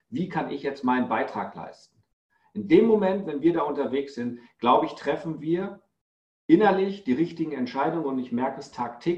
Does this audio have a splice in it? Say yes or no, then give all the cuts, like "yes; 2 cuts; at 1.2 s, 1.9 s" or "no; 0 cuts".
no; 0 cuts